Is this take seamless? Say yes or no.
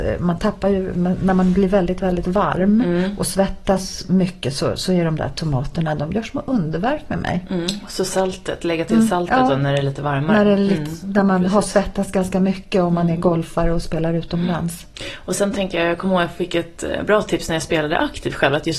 yes